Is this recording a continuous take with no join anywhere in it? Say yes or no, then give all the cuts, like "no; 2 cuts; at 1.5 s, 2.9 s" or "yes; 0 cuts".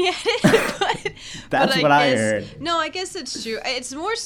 yes; 0 cuts